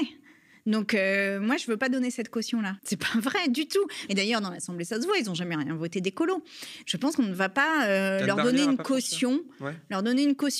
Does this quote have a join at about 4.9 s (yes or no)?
no